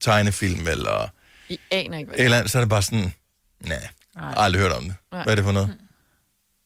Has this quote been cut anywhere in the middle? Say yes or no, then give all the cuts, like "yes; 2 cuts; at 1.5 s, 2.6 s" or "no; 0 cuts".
no; 0 cuts